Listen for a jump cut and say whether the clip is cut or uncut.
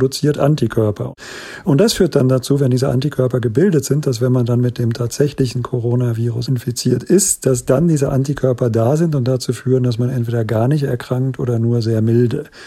uncut